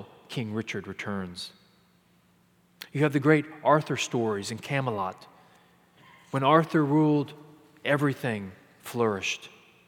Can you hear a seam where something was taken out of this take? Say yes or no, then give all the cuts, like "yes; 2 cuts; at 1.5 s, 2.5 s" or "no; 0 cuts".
no; 0 cuts